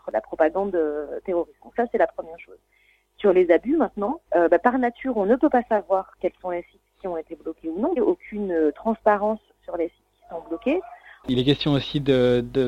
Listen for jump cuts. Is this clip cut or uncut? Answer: cut